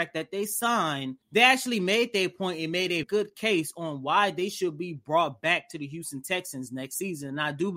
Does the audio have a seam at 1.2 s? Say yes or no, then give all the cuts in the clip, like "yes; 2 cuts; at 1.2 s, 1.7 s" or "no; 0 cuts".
yes; 2 cuts; at 1.2 s, 3.0 s